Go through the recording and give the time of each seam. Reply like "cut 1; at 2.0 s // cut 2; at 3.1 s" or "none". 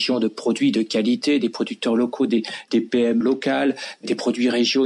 cut 1; at 3.2 s